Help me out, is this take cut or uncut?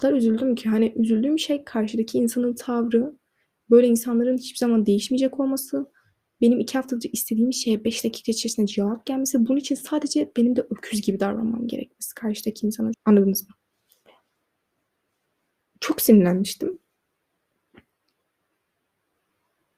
cut